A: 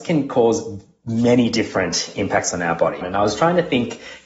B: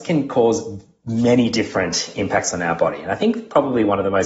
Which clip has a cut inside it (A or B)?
A